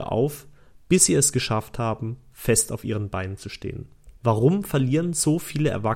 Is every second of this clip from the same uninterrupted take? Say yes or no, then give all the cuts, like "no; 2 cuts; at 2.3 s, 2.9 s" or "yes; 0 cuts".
no; 1 cut; at 4.2 s